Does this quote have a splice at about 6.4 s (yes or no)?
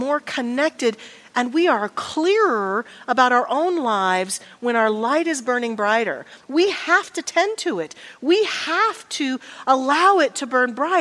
yes